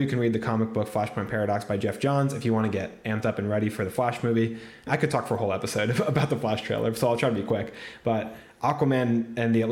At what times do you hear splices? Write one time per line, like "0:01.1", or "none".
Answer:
0:04.9